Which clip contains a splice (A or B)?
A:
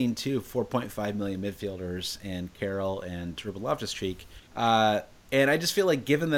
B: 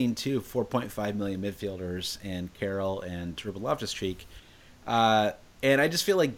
A